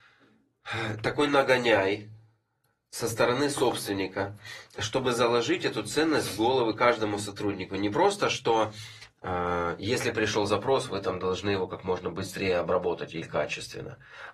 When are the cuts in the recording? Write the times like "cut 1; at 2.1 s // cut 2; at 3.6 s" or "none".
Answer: none